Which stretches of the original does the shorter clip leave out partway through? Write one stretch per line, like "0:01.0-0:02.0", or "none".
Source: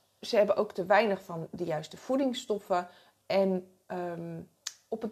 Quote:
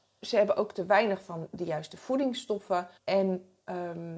0:03.0-0:03.2